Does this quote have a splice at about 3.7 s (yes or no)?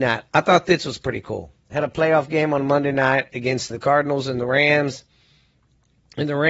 yes